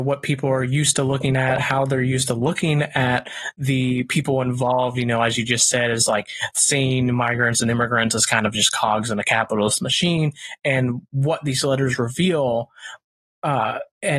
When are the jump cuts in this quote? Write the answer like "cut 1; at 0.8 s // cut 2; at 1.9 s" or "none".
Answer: none